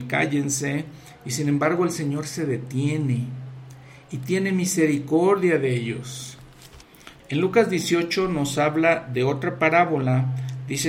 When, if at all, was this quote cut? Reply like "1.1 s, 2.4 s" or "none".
7.2 s